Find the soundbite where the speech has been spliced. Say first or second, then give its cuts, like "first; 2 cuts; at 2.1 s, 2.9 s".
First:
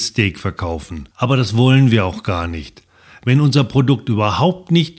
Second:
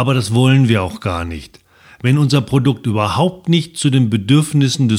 first; 1 cut; at 1.1 s